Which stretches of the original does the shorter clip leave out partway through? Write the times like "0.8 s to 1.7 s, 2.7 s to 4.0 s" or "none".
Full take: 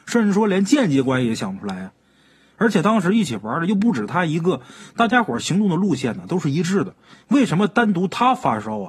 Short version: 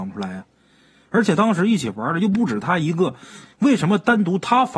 4.9 s to 7.1 s